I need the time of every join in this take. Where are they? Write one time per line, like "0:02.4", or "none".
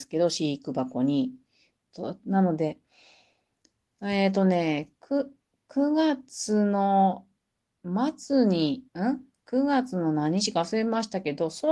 0:01.8
0:08.9